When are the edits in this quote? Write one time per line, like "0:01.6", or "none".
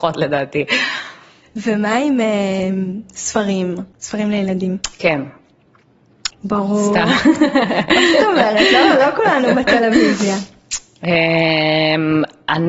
0:03.9
0:06.3